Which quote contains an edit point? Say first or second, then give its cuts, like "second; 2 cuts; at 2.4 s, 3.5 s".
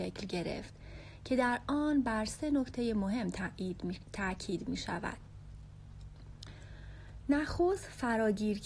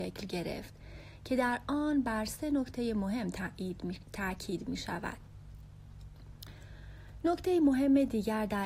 second; 1 cut; at 7.2 s